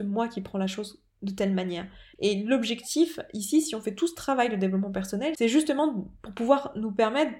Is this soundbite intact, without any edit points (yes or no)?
no